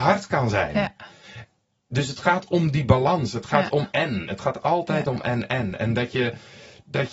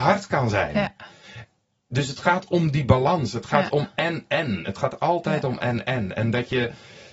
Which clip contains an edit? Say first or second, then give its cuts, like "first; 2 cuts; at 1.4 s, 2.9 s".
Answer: first; 1 cut; at 3.9 s